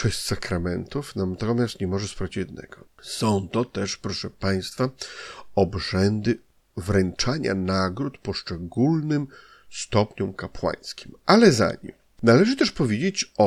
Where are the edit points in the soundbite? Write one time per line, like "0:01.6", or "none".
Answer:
0:02.9